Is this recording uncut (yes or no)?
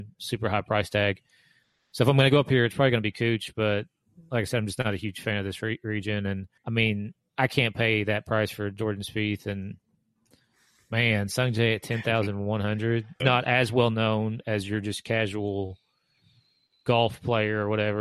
no